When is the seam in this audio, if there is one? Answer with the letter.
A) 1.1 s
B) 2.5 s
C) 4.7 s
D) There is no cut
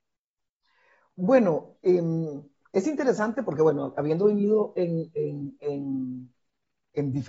D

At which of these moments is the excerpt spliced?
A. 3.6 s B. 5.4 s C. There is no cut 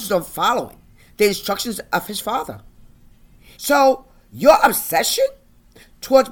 A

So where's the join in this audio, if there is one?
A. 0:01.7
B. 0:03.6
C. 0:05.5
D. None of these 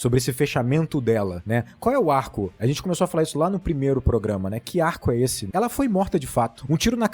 C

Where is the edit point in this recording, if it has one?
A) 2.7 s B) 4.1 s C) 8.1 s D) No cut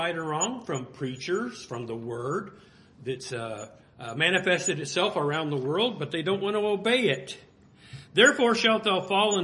D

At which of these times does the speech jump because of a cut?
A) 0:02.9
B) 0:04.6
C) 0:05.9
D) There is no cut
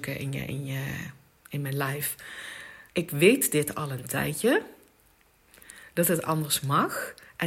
A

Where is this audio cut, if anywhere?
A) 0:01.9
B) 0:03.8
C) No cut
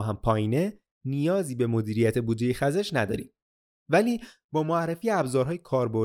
B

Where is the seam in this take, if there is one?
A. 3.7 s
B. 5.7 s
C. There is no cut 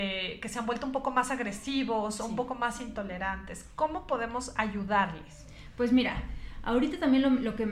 C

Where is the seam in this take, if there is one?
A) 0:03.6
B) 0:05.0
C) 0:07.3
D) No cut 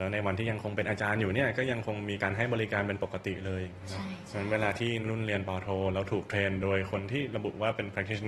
B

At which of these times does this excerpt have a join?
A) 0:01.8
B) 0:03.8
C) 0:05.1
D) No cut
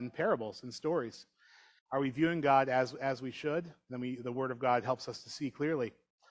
A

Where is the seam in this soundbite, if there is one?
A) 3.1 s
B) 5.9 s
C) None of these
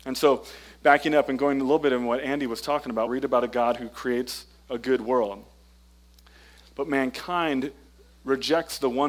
A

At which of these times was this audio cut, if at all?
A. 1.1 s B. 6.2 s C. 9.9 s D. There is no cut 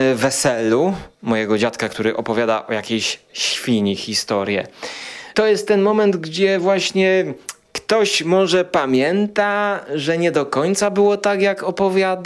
A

